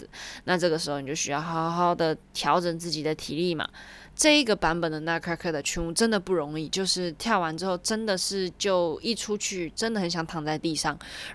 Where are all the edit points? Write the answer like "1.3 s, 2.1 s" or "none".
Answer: 4.1 s